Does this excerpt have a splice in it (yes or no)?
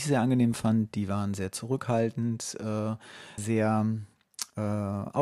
yes